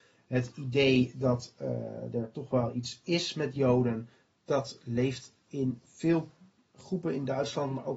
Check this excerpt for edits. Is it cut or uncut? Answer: uncut